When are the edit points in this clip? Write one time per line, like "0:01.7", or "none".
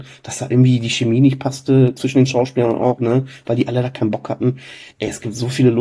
0:04.9